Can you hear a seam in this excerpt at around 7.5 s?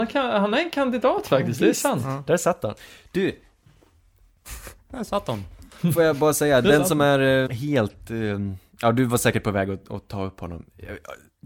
yes; 1 cut; at 7.5 s

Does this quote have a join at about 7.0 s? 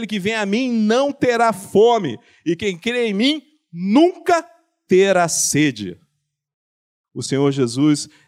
yes; 1 cut; at 7.0 s

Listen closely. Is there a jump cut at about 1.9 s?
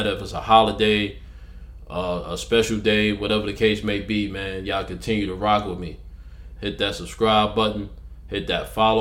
no; 1 cut; at 6.6 s

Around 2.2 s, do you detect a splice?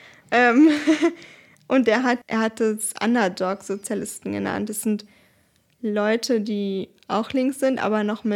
yes; 1 cut; at 2.2 s

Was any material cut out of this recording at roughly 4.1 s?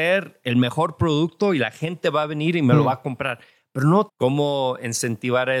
yes; 1 cut; at 4.1 s

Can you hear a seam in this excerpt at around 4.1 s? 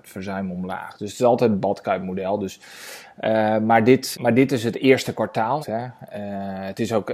yes; 2 cuts; at 4.1 s, 5.6 s

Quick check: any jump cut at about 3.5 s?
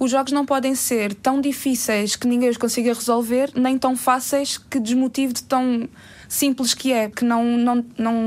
no; 0 cuts

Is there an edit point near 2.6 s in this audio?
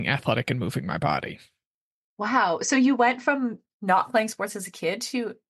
no; 0 cuts

